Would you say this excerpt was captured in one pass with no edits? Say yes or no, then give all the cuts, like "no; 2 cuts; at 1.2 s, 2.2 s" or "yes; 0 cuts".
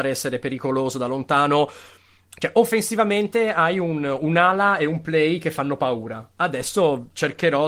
yes; 0 cuts